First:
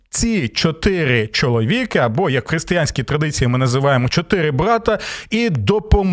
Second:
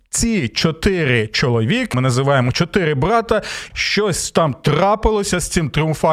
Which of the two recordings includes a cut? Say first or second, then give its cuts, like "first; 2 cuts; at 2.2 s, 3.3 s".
second; 2 cuts; at 1.9 s, 3.7 s